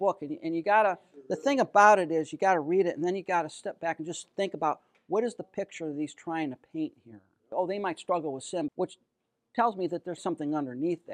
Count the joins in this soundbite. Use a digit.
3